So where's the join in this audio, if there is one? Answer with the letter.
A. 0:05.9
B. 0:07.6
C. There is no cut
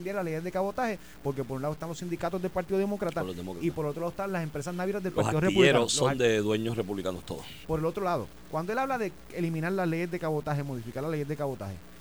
B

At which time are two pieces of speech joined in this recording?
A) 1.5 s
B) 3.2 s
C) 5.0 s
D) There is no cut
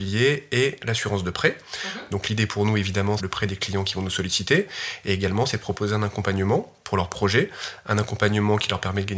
B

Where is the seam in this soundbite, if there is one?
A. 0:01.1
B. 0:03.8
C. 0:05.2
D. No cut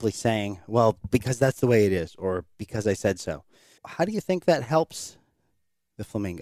B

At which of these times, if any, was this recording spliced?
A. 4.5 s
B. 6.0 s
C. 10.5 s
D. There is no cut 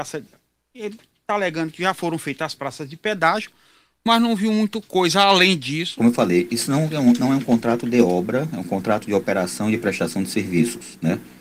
B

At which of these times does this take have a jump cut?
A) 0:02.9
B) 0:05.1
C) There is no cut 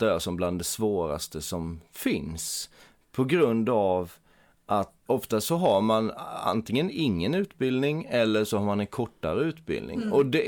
B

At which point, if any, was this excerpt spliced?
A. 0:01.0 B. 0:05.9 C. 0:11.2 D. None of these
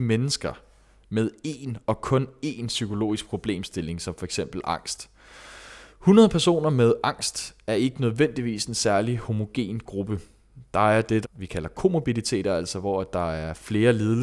C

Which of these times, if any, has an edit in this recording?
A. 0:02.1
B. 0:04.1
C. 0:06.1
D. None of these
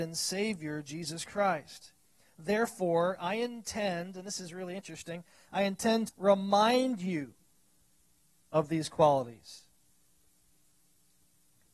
C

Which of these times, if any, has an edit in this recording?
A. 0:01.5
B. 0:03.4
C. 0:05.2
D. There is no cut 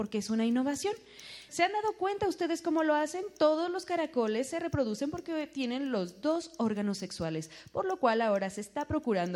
A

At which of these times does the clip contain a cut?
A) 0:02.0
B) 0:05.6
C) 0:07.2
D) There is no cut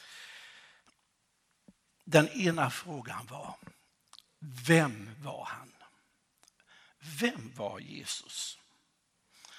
D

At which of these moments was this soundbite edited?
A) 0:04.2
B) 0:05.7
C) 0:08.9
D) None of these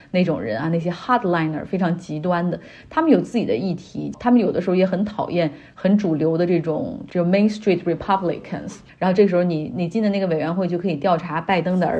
C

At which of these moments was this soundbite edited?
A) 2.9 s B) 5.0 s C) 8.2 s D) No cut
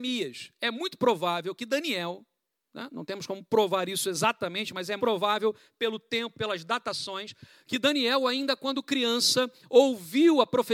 B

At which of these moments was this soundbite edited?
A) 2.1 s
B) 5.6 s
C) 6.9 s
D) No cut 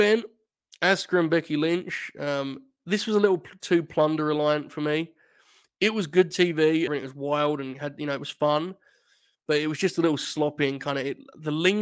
C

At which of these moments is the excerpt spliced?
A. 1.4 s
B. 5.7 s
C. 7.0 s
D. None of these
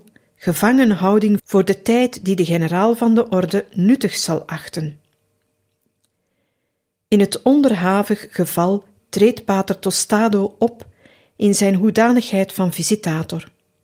A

